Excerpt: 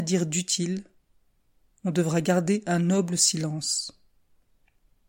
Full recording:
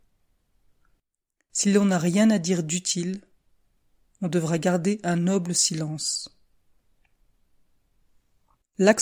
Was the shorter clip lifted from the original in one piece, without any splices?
yes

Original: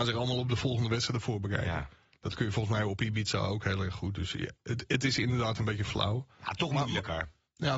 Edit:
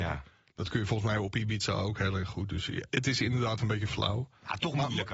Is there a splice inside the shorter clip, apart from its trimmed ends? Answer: yes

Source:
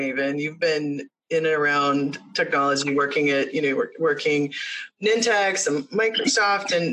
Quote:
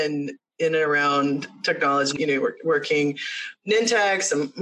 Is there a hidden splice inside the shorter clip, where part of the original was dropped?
yes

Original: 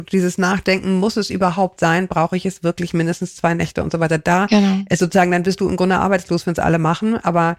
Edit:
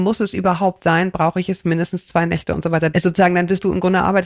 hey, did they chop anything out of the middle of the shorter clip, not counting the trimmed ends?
yes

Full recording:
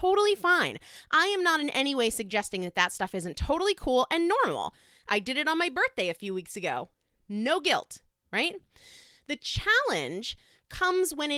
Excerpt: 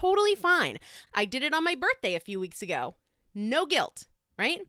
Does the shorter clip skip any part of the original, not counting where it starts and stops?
yes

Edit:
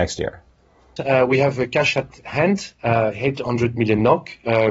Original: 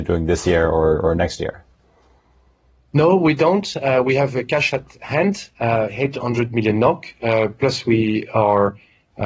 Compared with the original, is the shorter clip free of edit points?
no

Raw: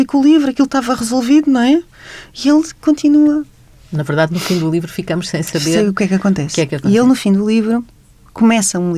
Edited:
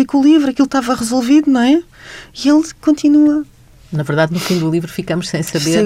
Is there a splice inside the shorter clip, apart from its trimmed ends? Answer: no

